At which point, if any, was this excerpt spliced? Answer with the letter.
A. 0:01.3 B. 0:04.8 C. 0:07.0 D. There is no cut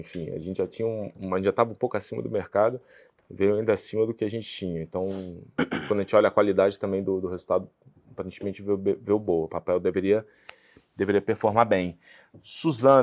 D